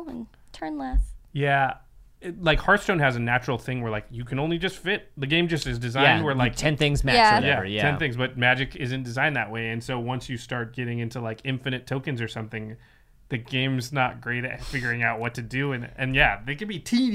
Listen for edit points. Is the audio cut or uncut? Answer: cut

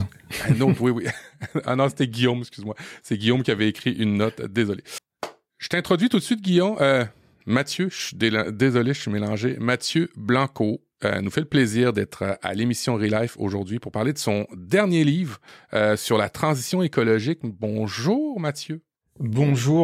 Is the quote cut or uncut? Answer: uncut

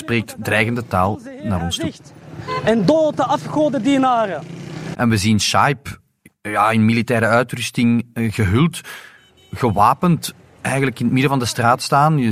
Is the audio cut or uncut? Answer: cut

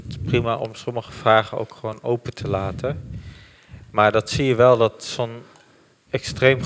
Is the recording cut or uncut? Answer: uncut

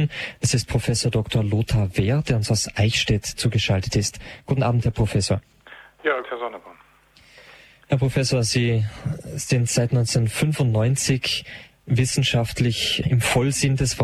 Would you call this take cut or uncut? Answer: cut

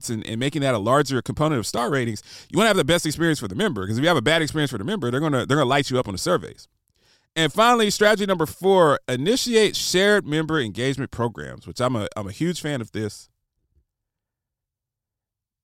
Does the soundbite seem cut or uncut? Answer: uncut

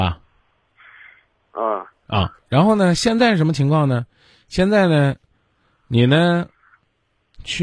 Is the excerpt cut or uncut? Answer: uncut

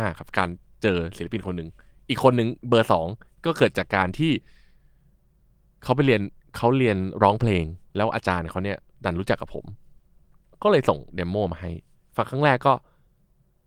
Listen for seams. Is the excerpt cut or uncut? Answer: uncut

